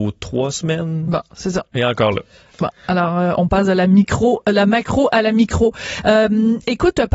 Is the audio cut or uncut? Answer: uncut